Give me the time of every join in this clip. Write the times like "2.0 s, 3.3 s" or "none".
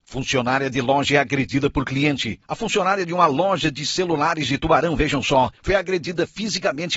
none